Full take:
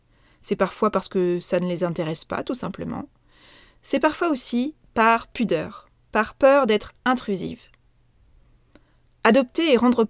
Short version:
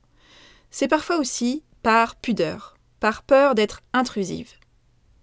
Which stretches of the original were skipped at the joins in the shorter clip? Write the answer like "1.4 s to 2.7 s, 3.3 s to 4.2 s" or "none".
none